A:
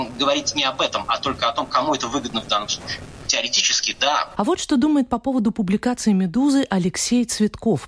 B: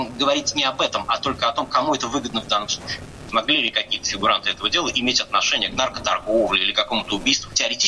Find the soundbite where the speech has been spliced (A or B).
A